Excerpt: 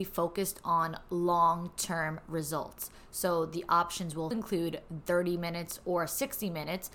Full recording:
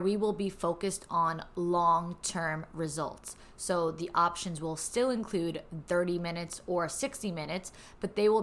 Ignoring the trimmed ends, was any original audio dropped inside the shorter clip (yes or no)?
yes